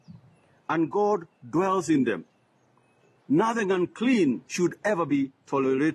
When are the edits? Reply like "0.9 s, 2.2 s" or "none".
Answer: 3.2 s, 4.4 s